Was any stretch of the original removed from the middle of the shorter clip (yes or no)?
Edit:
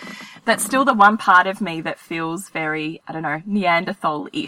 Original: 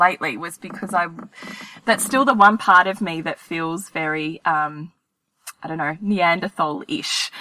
yes